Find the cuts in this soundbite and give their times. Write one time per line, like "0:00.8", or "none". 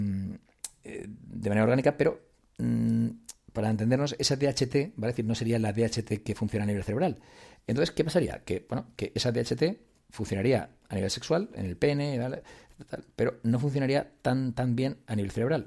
none